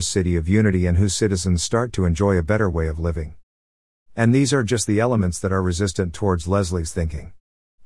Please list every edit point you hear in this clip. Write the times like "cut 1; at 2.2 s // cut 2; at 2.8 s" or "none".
none